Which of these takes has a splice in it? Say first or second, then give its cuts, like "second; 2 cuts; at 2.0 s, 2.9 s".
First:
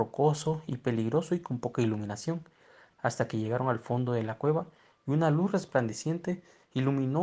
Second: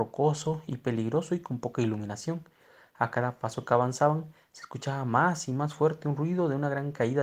first; 1 cut; at 2.9 s